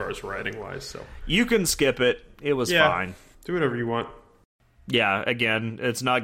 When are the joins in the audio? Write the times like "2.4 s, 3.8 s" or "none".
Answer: 3.3 s